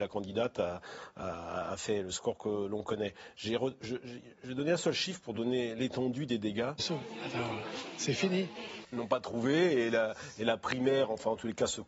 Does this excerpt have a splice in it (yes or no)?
yes